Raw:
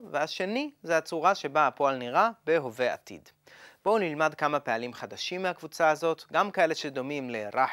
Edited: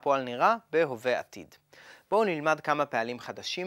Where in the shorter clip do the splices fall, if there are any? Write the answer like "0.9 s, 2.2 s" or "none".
none